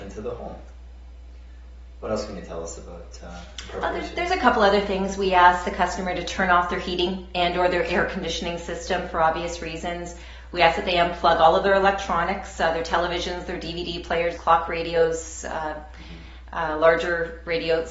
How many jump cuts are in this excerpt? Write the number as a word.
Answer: one